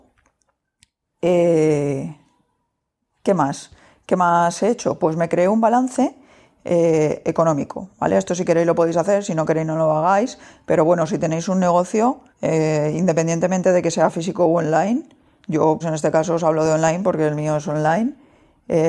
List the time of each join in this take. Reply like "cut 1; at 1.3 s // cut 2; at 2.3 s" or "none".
cut 1; at 12.3 s // cut 2; at 15.8 s

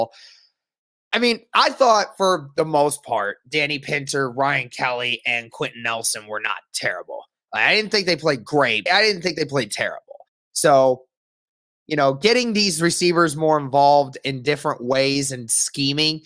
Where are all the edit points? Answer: cut 1; at 8.9 s // cut 2; at 10.4 s

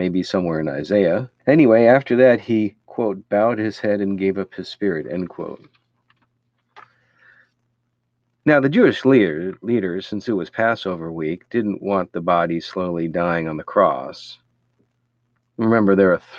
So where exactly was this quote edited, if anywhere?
cut 1; at 1.4 s

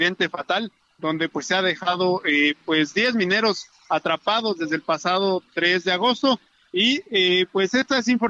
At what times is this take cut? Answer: none

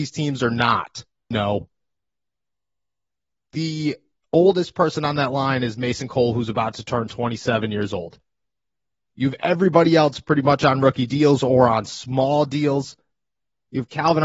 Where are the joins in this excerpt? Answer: cut 1; at 1.3 s

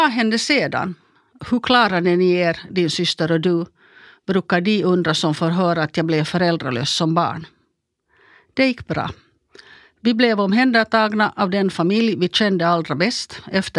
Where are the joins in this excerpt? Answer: none

